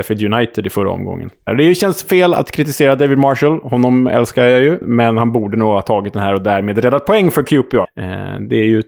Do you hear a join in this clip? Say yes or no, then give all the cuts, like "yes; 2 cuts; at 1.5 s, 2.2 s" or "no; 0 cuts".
yes; 3 cuts; at 1.5 s, 4.8 s, 7.8 s